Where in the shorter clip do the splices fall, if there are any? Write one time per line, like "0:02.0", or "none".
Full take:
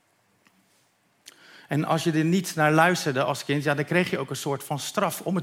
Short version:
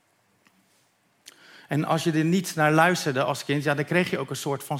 none